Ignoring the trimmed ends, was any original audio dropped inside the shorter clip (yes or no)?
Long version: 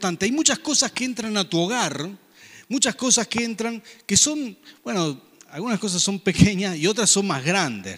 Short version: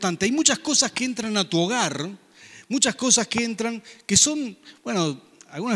no